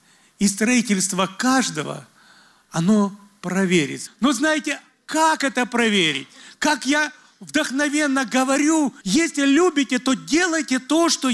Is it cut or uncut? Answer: cut